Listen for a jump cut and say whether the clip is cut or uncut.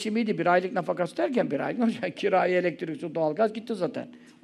uncut